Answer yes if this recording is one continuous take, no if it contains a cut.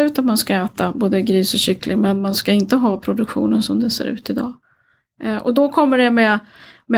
yes